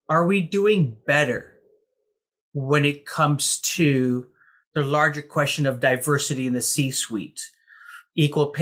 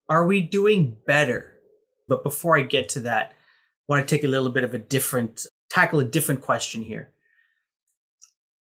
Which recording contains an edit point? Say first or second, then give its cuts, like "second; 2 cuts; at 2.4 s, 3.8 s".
second; 2 cuts; at 2.1 s, 5.5 s